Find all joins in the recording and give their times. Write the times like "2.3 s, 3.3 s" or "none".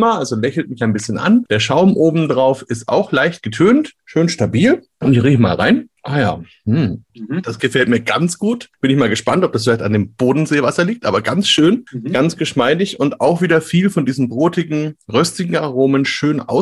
7.1 s